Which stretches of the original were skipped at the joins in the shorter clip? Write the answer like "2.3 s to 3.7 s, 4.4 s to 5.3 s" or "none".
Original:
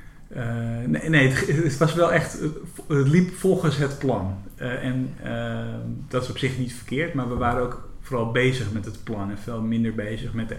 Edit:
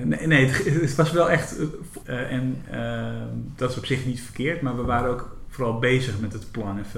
2.8 s to 4.5 s